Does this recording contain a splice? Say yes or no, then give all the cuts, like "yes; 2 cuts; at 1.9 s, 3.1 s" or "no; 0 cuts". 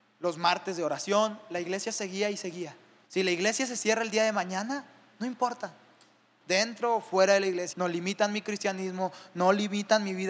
yes; 3 cuts; at 3.0 s, 6.4 s, 7.7 s